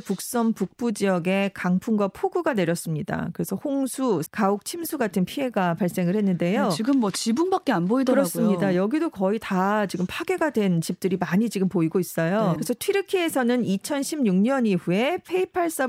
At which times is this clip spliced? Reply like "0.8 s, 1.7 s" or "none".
4.3 s, 12.6 s